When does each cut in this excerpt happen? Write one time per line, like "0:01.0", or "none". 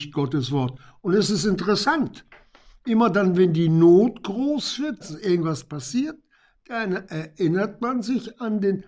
0:05.0